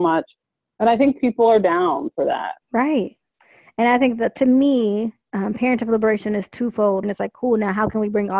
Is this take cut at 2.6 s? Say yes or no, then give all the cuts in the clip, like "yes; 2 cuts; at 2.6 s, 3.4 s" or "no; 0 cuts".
yes; 3 cuts; at 2.6 s, 5.2 s, 7.0 s